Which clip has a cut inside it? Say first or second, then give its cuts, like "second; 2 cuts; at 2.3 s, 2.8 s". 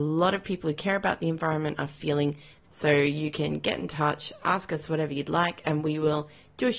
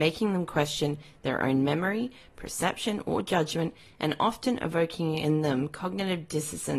first; 1 cut; at 2.6 s